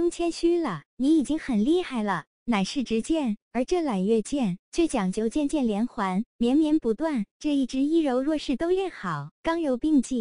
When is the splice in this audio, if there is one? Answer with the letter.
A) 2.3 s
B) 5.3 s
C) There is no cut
A